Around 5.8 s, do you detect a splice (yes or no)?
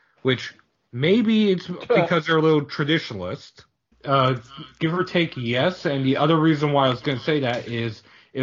no